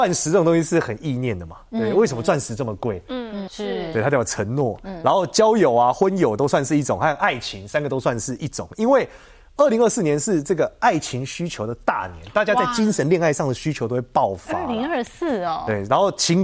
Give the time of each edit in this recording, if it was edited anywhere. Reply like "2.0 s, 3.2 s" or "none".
3.5 s